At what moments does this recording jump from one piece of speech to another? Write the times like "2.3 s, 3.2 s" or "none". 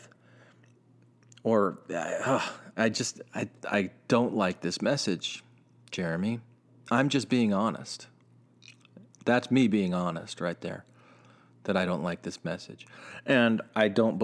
none